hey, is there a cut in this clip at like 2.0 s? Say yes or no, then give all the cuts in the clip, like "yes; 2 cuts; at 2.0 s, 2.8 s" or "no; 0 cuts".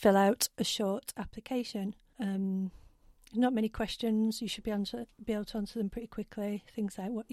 no; 0 cuts